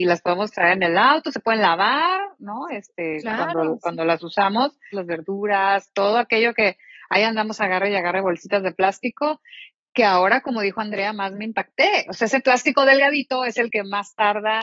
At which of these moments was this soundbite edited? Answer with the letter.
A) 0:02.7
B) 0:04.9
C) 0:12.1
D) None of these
B